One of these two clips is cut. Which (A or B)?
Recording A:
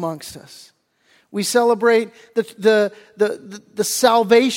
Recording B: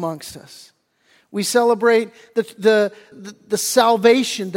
B